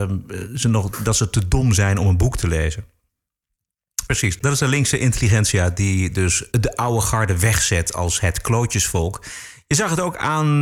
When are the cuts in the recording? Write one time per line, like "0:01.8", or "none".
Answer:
0:04.1
0:06.5

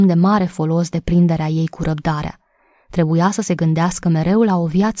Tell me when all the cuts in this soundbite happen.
none

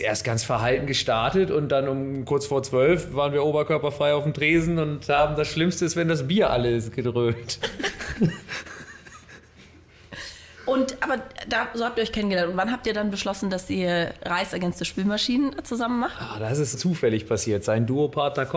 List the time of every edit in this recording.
0:07.6
0:16.7

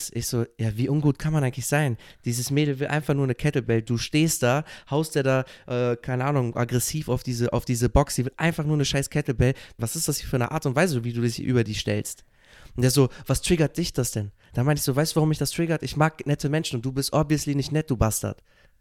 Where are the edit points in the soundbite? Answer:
0:09.8

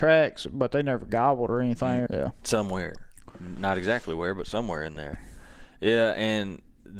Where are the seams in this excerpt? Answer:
0:02.1

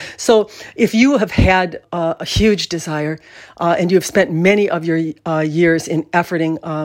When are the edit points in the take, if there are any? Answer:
0:01.8

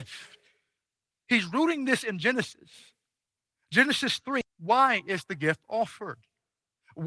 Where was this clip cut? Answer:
0:01.1
0:04.4

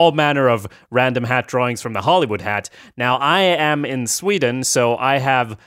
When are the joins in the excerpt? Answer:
none

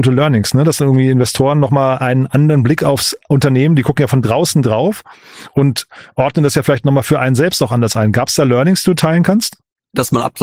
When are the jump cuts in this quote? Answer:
none

